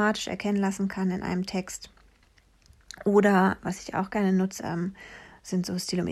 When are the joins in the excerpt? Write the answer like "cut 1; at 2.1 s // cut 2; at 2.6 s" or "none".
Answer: cut 1; at 4.6 s